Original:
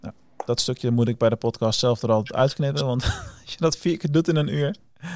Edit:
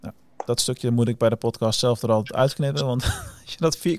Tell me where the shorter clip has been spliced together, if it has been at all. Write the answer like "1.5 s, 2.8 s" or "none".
none